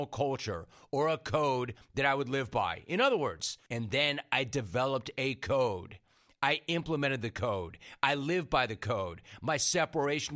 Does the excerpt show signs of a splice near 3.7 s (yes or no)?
yes